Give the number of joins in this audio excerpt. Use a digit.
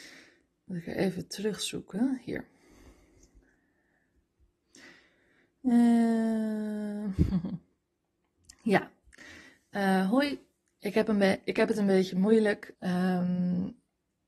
1